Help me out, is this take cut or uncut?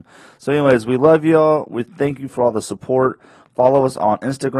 uncut